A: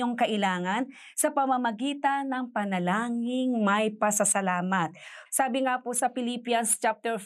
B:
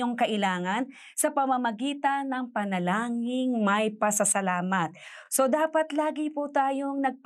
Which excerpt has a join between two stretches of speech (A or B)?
A